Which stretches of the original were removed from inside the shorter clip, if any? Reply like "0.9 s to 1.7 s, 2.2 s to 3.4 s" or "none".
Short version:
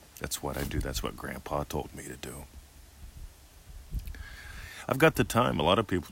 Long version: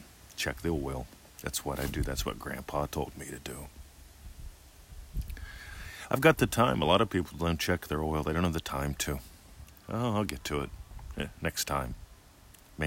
none

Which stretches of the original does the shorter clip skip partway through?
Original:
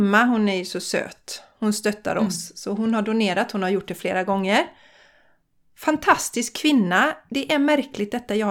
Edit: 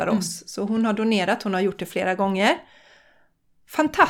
none

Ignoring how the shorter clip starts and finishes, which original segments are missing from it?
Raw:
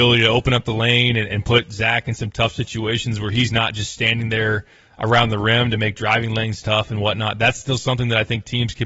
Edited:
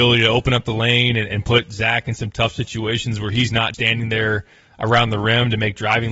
3.7 s to 3.9 s

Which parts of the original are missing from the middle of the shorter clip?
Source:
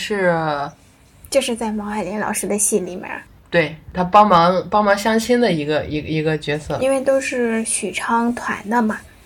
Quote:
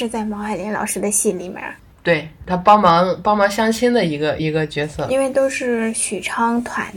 5.9 s to 6.1 s

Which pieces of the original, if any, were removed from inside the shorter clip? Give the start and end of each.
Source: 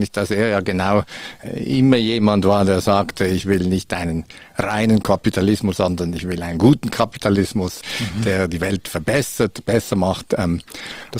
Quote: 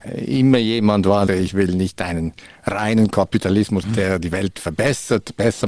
2.7 s to 3.2 s, 5.7 s to 8.1 s

